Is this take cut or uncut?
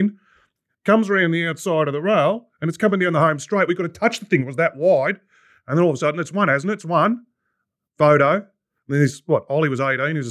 uncut